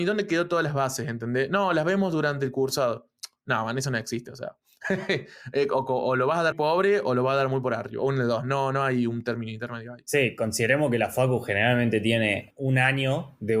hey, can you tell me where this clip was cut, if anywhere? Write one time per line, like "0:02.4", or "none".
0:06.5
0:12.5